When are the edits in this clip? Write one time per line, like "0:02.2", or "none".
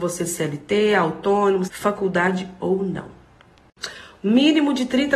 0:01.7